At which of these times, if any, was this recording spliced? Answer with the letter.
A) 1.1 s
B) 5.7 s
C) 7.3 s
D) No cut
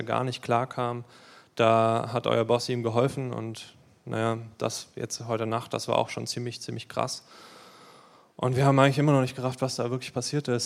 D